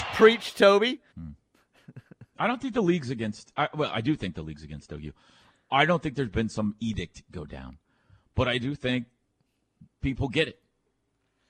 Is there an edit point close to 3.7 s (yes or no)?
no